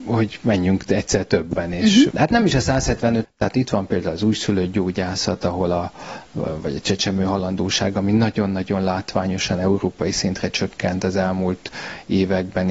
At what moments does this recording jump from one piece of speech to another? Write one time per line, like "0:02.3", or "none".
0:02.1
0:03.2

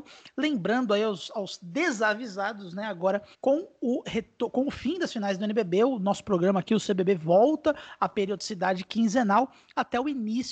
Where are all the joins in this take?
0:03.3

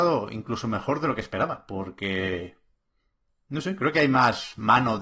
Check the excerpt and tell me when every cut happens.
none

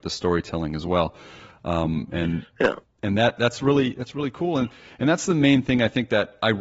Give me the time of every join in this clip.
none

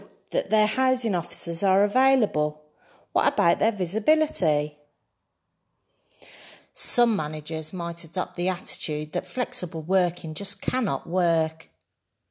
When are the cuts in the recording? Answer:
0:06.6

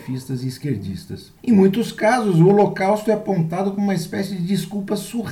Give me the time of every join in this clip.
0:01.4

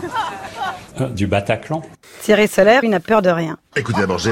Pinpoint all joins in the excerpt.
0:00.9
0:02.8

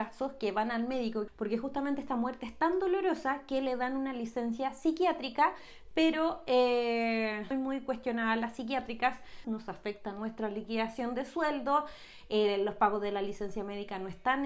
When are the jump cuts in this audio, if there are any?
0:01.3
0:07.5
0:09.4

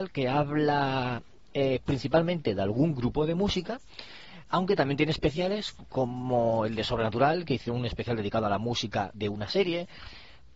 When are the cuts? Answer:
0:09.1

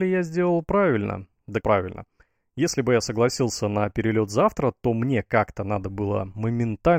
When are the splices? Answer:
0:01.6

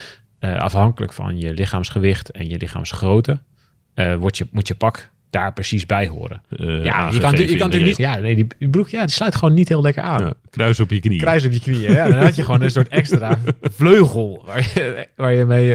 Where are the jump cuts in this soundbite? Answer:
0:06.5
0:08.0

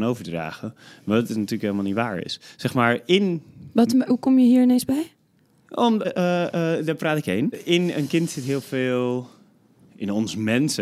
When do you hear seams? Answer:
0:06.0
0:07.5

